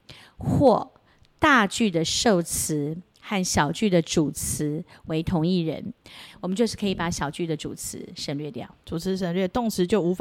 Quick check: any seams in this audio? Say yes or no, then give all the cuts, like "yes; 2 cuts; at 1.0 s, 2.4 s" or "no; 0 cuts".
yes; 2 cuts; at 6.3 s, 8.8 s